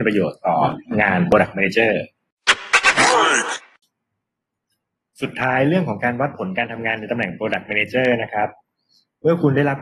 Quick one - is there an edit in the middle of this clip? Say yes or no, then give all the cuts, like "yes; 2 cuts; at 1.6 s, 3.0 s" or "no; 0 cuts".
no; 0 cuts